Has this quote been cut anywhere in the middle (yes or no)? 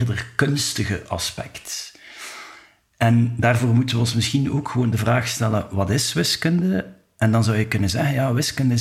no